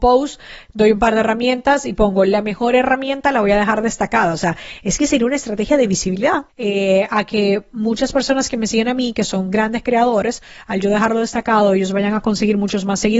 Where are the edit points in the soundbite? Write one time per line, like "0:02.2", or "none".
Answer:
0:06.5

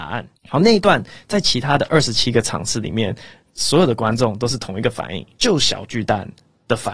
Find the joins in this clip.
none

